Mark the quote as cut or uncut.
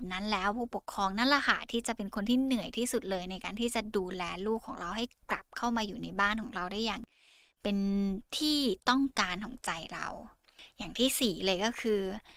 uncut